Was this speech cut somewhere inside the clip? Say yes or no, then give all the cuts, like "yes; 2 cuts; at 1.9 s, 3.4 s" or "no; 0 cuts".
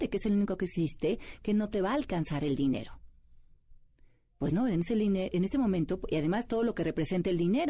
no; 0 cuts